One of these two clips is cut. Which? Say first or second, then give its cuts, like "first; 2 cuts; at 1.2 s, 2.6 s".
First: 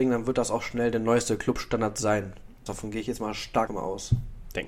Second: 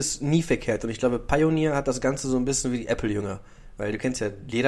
first; 2 cuts; at 2.7 s, 3.7 s